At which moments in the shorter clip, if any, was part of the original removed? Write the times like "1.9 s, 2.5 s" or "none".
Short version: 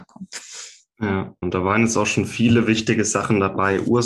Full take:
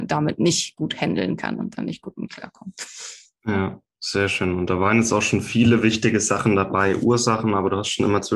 1.4 s

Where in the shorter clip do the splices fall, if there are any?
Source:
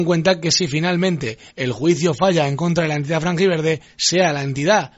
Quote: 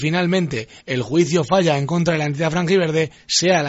none

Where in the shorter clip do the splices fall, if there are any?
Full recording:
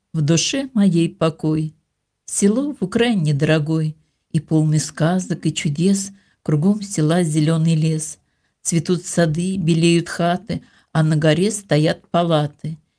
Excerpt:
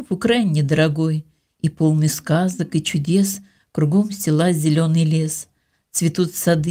none

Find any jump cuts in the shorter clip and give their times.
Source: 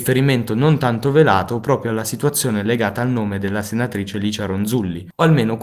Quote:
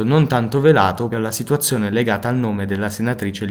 1.1 s

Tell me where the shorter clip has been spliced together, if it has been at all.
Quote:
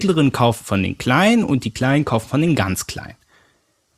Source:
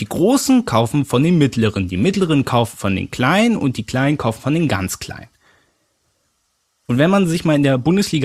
none

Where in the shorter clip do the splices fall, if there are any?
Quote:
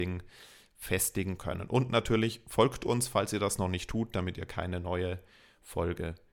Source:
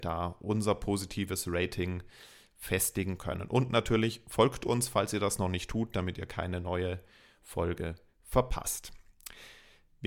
none

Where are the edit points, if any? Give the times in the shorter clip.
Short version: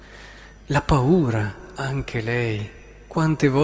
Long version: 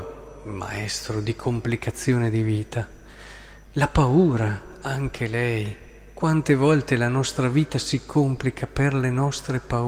none

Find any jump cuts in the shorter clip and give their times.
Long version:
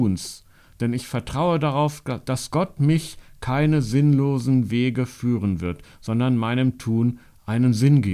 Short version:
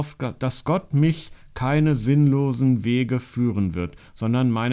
none

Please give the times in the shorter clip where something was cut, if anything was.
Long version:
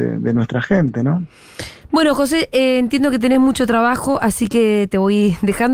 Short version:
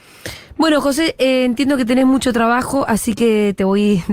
none

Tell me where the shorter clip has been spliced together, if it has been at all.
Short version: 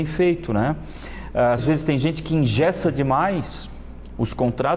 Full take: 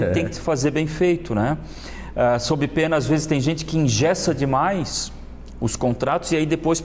1.6 s

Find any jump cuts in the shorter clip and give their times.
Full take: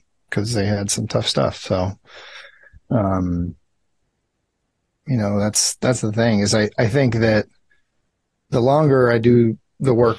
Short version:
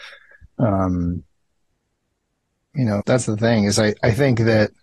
3.0 s

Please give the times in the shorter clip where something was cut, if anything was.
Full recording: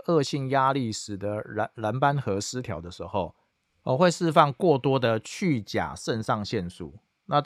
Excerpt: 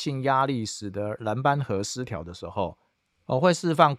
1.2 s

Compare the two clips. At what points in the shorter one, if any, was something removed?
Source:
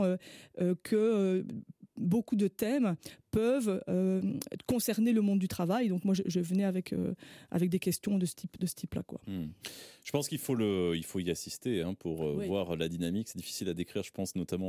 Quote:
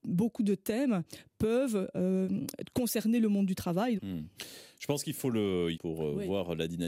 4.0 s, 5.7 s

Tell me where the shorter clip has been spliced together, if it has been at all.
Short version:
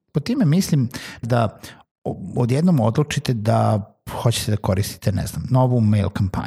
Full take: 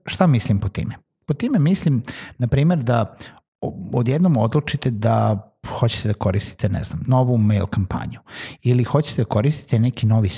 1.2 s

